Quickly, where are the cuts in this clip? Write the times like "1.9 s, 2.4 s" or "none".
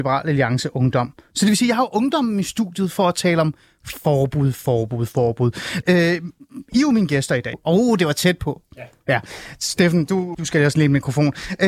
5.8 s, 7.5 s, 10.3 s